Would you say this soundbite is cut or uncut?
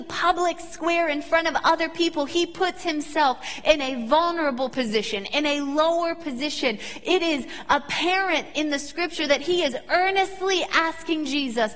uncut